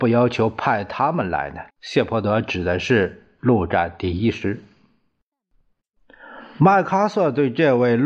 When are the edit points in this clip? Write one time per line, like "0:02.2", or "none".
0:01.7